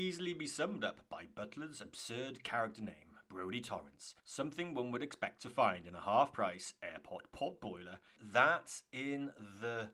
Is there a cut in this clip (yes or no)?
yes